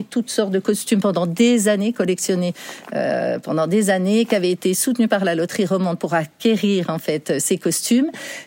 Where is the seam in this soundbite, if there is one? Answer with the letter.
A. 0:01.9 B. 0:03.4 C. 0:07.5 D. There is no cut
D